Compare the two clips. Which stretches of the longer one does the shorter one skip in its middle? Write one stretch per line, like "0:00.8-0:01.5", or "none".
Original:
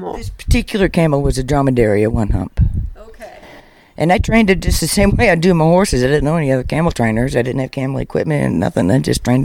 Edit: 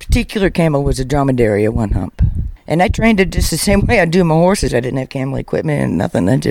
0:02.9-0:03.9
0:06.0-0:07.3